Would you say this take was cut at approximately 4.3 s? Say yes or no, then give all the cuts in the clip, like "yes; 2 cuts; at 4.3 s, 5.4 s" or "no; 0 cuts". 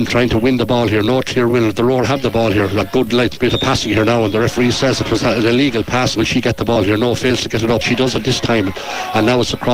no; 2 cuts; at 6.2 s, 7.8 s